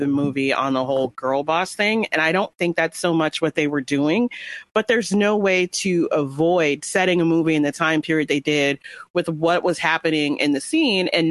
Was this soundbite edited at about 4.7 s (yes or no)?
no